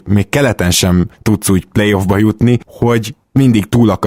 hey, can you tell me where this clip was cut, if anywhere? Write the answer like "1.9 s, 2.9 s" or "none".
none